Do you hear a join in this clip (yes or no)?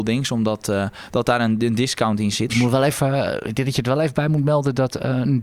yes